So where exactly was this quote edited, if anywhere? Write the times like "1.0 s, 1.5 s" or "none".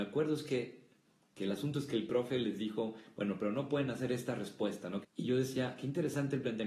5.0 s

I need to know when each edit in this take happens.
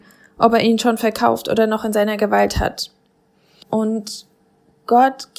3.6 s

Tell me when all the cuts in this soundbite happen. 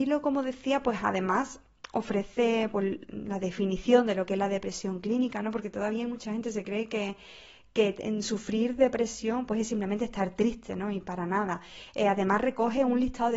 none

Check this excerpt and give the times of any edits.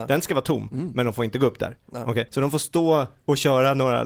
2.3 s

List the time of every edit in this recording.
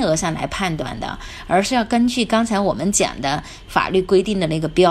none

